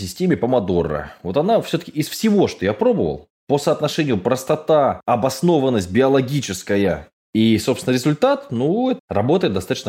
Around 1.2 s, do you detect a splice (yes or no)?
no